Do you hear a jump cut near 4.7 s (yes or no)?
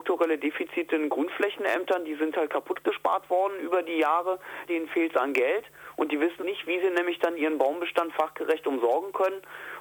yes